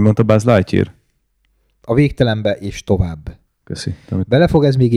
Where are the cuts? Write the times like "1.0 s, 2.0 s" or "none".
none